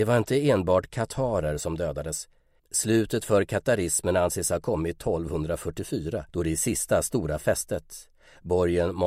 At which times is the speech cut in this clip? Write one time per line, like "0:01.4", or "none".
0:02.6
0:06.3